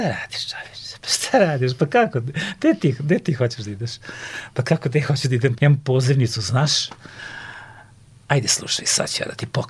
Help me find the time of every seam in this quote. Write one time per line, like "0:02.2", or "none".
0:05.6